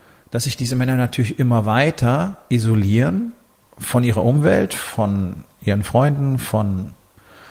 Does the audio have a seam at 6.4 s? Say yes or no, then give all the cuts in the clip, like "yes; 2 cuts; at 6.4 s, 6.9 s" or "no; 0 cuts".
no; 0 cuts